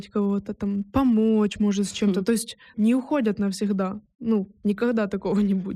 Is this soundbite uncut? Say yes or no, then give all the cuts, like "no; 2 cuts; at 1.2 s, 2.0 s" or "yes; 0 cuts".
no; 1 cut; at 2.7 s